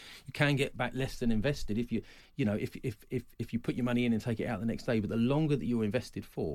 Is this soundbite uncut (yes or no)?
yes